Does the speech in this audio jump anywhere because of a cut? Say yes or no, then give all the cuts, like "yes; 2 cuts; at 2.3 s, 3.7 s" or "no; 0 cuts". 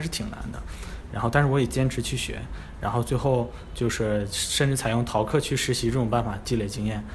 no; 0 cuts